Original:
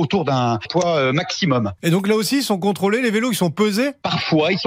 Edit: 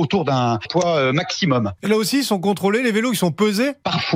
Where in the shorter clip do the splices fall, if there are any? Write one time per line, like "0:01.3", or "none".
0:01.8